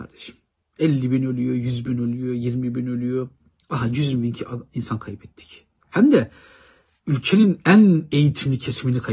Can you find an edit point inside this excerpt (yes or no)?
no